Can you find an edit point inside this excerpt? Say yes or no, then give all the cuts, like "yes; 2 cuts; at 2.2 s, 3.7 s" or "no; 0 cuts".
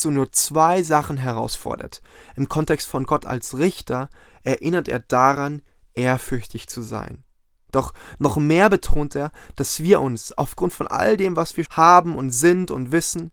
yes; 1 cut; at 11.6 s